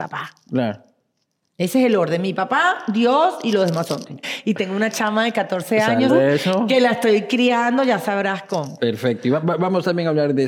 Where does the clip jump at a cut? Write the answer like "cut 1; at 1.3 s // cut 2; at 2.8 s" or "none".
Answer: cut 1; at 4.2 s // cut 2; at 6.1 s

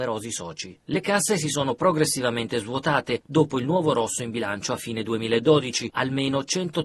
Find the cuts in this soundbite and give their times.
none

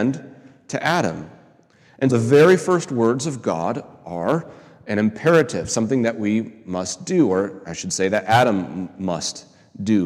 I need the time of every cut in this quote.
cut 1; at 2.1 s

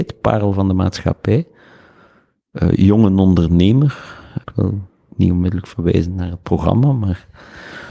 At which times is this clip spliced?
cut 1; at 4.4 s

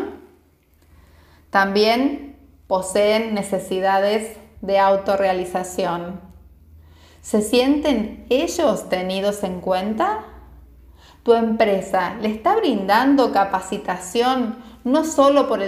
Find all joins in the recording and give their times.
none

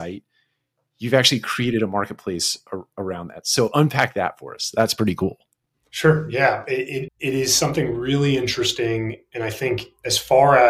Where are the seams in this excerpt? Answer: cut 1; at 7.1 s

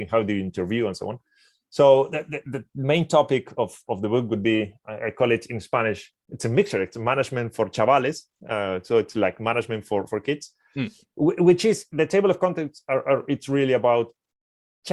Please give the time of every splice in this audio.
cut 1; at 10.1 s

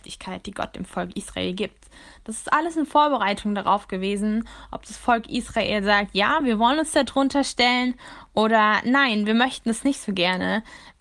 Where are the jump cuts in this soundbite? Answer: none

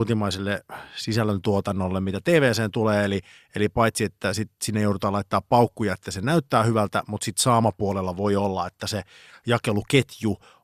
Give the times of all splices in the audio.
none

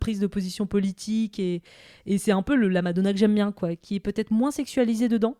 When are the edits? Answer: none

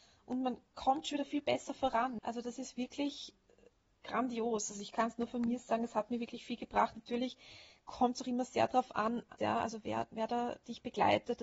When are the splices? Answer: cut 1; at 2.2 s // cut 2; at 9.4 s

